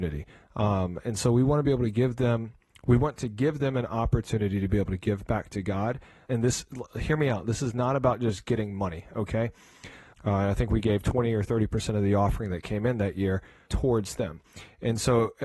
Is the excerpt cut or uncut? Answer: cut